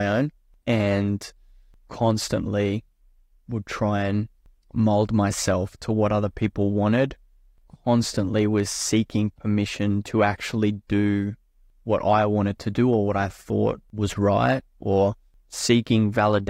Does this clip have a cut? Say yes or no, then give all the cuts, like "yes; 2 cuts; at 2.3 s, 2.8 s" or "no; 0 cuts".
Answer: no; 0 cuts